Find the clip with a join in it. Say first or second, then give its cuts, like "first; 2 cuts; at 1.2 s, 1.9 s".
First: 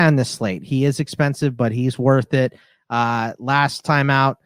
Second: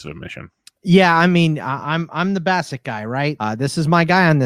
second; 1 cut; at 3.4 s